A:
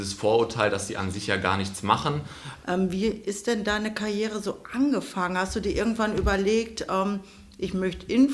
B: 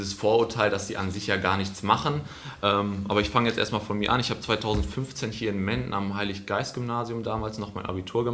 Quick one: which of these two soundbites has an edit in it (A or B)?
A